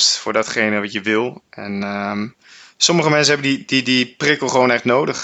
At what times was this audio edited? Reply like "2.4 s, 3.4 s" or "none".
none